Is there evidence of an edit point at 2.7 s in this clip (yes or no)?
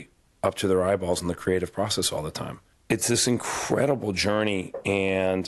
yes